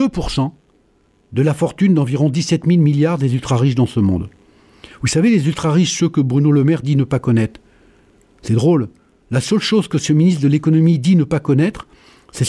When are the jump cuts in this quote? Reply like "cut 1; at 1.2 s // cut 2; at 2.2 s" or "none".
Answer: none